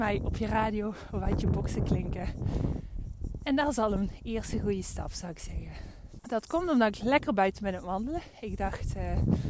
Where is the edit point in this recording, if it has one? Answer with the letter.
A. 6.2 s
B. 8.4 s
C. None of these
A